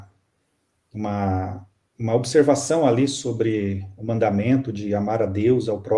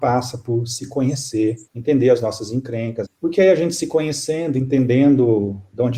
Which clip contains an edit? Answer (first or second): second